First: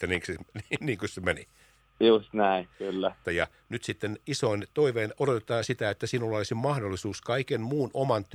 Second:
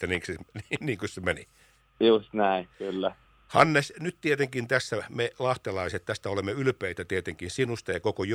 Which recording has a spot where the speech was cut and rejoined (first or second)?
first